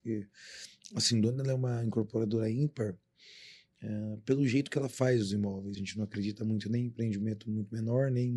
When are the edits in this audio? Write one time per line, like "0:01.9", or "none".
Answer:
0:05.7